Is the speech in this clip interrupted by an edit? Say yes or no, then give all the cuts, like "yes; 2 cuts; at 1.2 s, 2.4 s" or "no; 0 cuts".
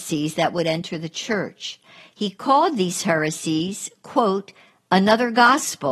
no; 0 cuts